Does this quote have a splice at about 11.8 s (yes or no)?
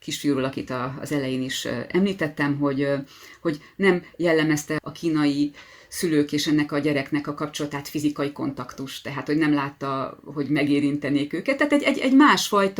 no